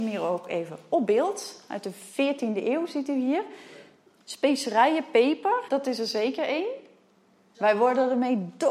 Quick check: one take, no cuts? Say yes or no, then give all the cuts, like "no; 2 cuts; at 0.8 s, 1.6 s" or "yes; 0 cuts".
no; 3 cuts; at 4.2 s, 5.7 s, 7.5 s